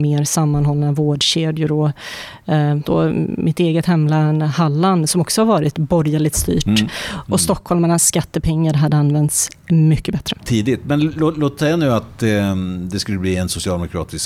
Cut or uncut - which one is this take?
cut